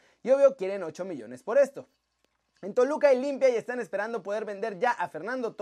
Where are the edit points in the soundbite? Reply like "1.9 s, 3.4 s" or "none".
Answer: none